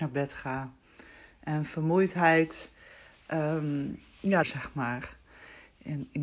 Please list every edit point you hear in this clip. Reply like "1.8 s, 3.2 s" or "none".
4.4 s